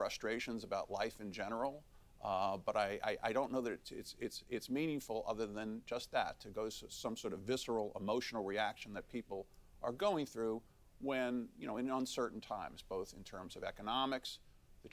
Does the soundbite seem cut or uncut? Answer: uncut